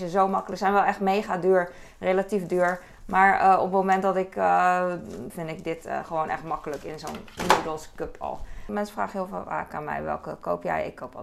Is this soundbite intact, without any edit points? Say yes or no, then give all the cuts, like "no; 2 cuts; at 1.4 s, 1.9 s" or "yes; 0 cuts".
no; 2 cuts; at 5.3 s, 8.7 s